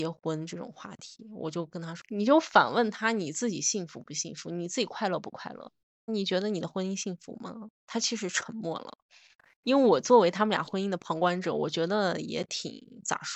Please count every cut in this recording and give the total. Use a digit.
1